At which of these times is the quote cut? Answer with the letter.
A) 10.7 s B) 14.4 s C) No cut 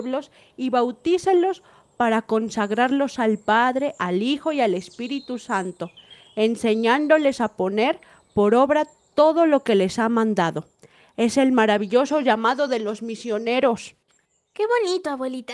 C